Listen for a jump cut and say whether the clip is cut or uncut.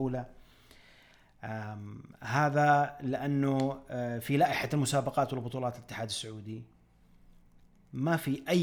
uncut